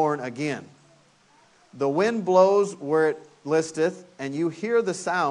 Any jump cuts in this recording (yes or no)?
no